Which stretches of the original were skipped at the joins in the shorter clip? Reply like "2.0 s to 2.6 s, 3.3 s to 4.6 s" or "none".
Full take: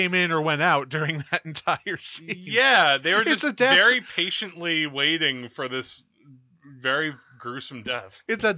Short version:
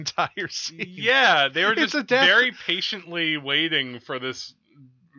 none

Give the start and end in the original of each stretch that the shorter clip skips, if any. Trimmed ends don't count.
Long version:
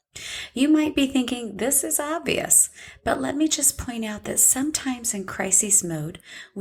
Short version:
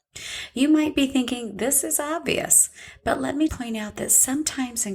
3.5 s to 3.8 s

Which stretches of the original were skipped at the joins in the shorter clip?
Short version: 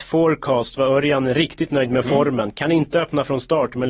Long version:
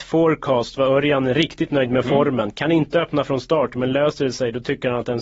none

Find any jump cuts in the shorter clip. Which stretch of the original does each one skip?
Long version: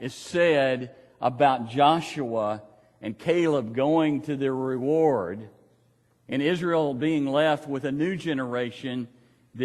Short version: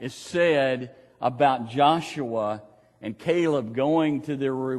none

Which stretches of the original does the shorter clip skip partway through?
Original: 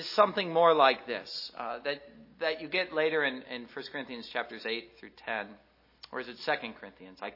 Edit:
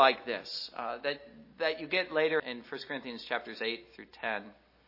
3.2 s to 3.4 s

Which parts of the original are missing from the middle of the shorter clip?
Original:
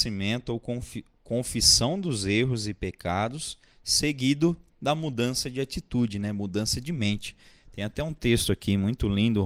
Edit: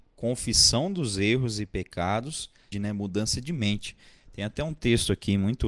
3.8 s to 6.1 s

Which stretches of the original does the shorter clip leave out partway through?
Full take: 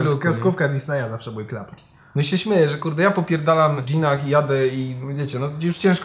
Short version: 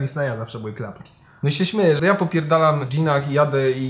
2.7 s to 3.0 s

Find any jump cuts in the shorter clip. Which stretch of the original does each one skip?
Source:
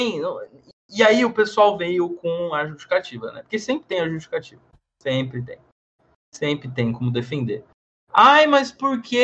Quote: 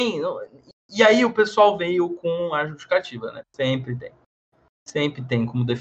3.4 s to 4.9 s

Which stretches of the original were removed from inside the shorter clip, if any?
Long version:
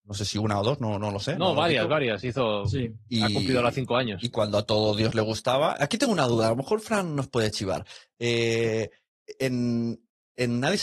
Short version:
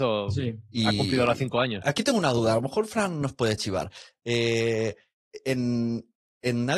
4.2 s to 5.8 s

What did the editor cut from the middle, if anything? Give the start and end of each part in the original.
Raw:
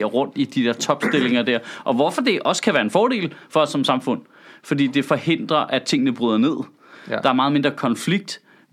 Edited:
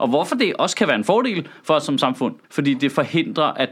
4.3 s to 4.6 s

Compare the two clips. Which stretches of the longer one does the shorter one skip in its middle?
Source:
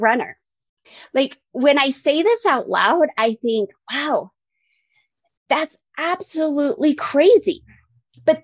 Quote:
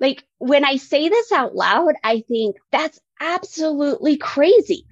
3.8 s to 5.4 s

